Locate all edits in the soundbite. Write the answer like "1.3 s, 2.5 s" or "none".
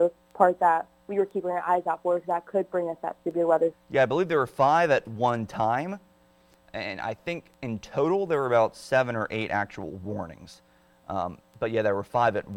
3.7 s